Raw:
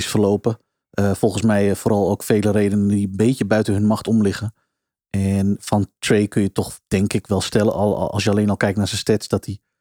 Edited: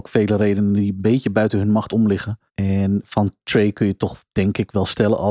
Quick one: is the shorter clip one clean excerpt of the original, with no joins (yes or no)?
no